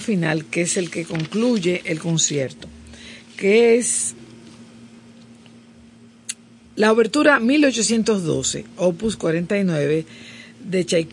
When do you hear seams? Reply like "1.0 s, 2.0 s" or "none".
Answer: none